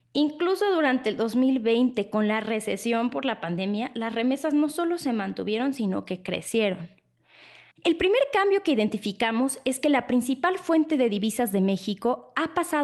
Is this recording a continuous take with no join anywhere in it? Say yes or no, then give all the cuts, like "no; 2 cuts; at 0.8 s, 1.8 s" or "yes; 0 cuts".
no; 1 cut; at 7.7 s